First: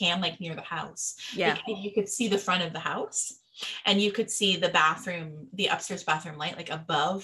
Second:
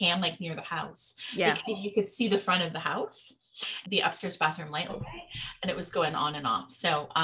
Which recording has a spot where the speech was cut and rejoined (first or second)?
second